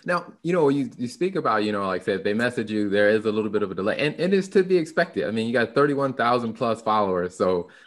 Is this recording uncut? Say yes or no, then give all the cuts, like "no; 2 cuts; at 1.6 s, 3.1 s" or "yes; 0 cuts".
yes; 0 cuts